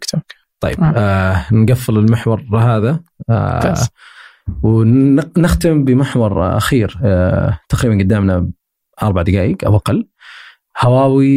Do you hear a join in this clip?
no; 0 cuts

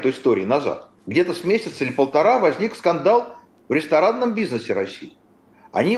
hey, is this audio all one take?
no; 1 cut; at 1.0 s

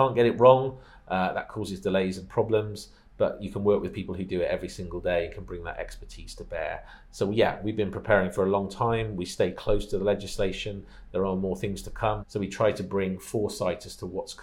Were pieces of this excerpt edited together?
yes; 1 cut; at 12.2 s

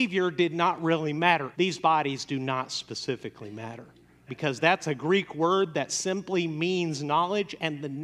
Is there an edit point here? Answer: yes; 2 cuts; at 1.5 s, 4.3 s

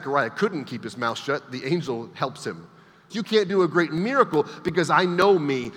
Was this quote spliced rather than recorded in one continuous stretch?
yes; 1 cut; at 3.1 s

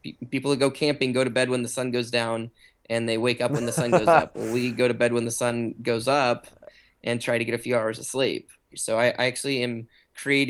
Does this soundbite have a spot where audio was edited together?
yes; 1 cut; at 8.7 s

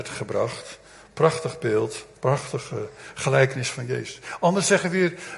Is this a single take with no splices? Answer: yes; 0 cuts

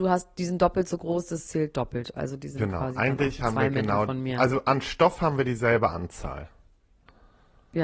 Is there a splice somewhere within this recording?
no; 0 cuts

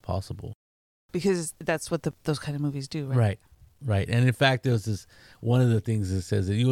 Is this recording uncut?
yes; 0 cuts

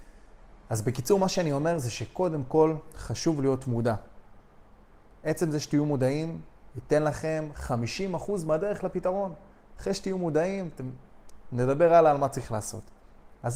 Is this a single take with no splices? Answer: yes; 0 cuts

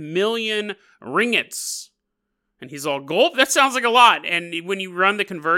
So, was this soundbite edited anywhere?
no; 0 cuts

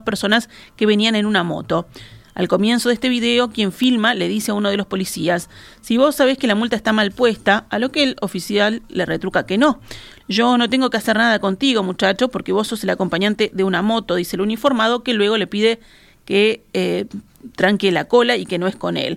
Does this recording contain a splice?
yes; 1 cut; at 10.2 s

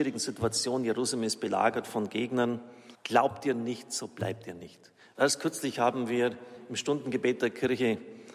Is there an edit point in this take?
yes; 2 cuts; at 2.9 s, 5.1 s

